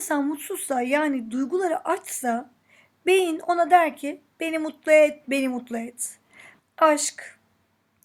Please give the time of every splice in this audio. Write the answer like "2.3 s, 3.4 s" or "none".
5.2 s, 6.6 s